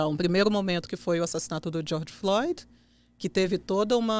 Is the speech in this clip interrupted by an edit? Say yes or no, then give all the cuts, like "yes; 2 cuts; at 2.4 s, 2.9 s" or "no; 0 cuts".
no; 0 cuts